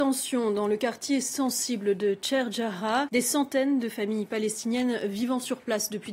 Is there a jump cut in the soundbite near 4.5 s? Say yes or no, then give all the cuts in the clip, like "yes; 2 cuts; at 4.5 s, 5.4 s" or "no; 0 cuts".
no; 1 cut; at 3.1 s